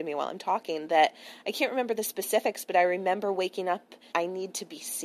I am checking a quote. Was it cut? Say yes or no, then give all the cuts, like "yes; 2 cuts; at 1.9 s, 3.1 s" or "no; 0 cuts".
yes; 1 cut; at 4.1 s